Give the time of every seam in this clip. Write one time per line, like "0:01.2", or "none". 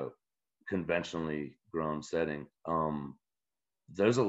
0:02.6